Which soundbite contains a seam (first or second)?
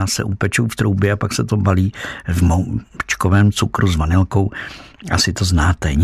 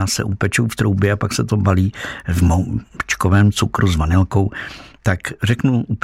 second